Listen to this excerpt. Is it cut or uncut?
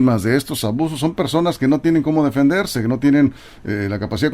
uncut